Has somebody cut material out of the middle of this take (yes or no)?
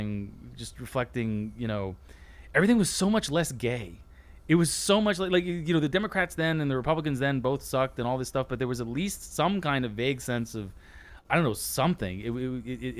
no